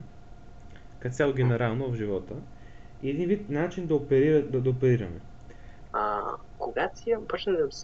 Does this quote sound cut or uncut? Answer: cut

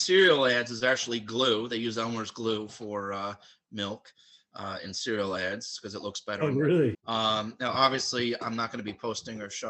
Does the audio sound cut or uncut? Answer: cut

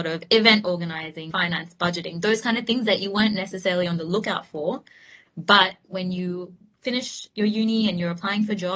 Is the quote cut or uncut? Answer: cut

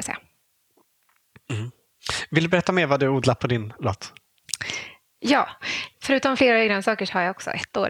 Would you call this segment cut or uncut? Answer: cut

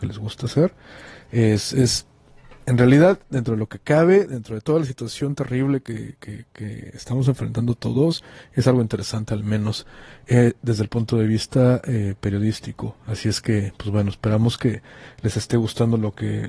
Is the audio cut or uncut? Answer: uncut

